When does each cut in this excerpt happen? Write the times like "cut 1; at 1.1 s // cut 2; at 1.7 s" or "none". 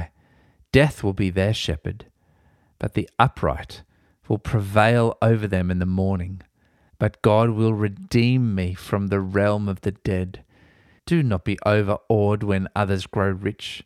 cut 1; at 6.9 s // cut 2; at 11.0 s